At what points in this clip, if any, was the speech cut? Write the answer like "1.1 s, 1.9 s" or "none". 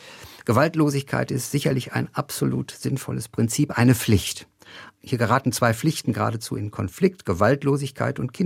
5.0 s